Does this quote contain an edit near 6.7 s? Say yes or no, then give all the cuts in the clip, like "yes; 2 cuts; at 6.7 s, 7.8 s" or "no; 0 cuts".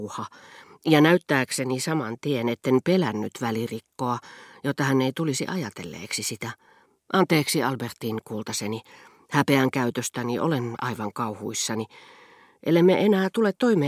no; 0 cuts